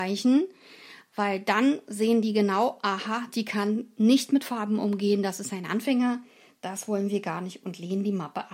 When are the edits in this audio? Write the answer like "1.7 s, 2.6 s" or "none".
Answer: none